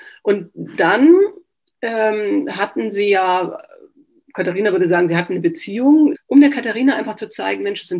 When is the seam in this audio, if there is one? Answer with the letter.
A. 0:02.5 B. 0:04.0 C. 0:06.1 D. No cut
C